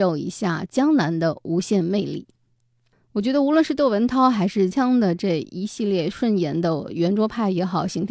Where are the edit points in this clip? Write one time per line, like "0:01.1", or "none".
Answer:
0:04.7